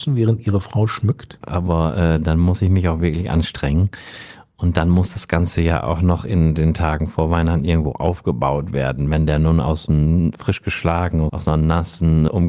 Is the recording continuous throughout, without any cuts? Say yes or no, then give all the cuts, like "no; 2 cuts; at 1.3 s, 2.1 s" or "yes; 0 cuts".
no; 1 cut; at 1.4 s